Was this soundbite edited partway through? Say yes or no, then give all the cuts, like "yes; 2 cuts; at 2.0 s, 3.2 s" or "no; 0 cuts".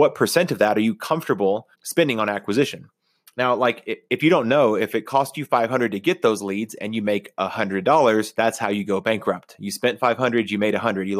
yes; 1 cut; at 1.7 s